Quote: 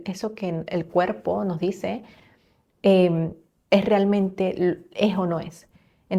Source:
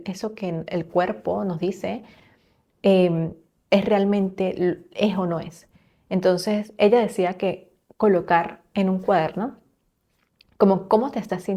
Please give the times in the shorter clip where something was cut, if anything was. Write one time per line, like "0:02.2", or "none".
none